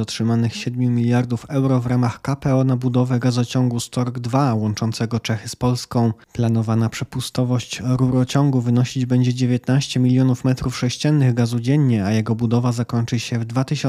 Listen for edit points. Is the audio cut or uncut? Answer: uncut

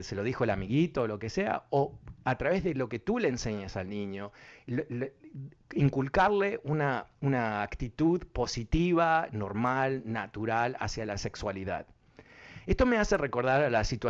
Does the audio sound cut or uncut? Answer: uncut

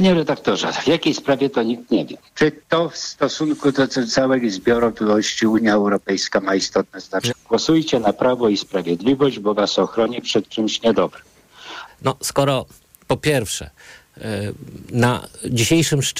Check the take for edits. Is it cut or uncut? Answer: cut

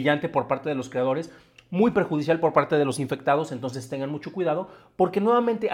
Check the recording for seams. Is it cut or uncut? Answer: uncut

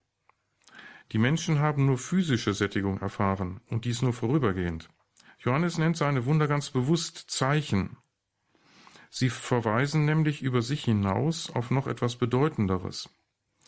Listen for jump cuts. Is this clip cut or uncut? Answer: cut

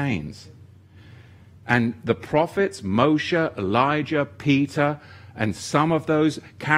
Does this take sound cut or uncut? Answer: cut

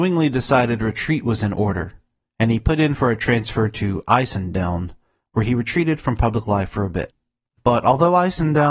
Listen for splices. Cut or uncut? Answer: uncut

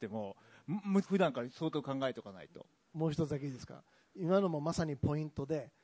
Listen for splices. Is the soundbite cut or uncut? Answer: cut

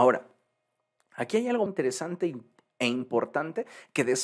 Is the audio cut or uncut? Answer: cut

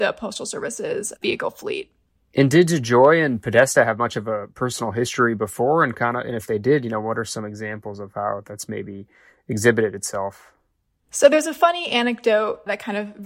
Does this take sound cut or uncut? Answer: uncut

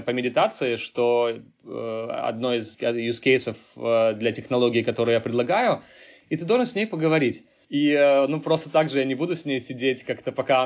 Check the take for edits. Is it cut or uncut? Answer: cut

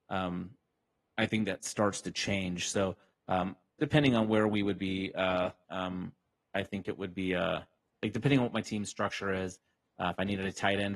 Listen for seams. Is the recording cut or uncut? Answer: cut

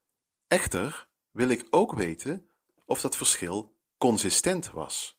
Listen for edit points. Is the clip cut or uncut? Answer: uncut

